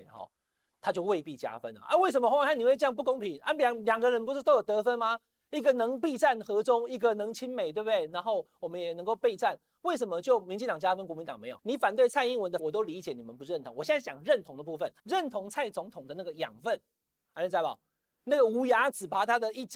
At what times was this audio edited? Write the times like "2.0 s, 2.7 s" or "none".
11.6 s, 12.6 s, 17.2 s